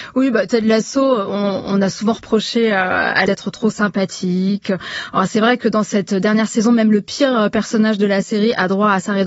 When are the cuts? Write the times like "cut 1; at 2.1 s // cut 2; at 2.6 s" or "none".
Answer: cut 1; at 3.3 s